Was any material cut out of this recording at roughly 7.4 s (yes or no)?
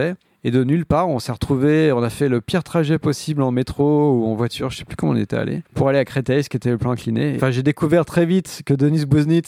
yes